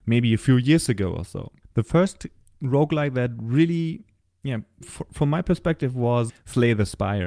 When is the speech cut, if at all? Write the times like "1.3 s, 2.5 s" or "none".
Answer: 4.8 s, 6.3 s